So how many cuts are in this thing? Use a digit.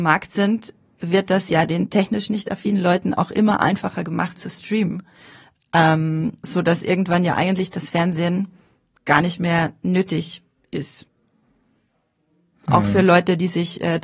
0